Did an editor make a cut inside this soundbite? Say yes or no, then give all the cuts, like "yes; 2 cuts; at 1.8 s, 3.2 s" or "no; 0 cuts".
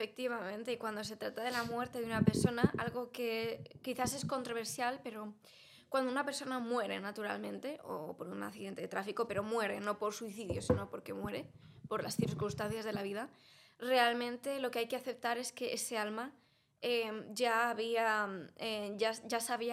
no; 0 cuts